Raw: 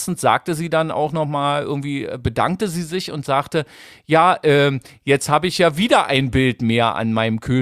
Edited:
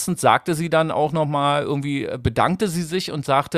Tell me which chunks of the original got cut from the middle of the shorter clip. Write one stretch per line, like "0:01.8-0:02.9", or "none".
none